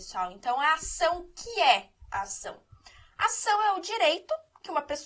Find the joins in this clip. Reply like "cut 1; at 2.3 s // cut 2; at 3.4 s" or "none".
none